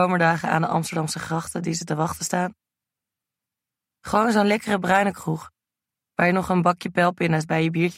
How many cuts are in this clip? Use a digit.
1